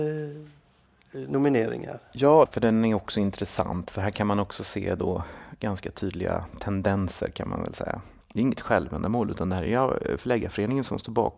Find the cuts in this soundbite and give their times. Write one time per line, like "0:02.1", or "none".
0:02.5
0:08.2